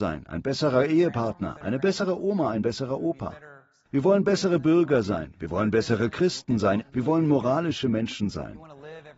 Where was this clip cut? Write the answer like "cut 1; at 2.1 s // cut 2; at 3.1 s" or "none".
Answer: cut 1; at 6.8 s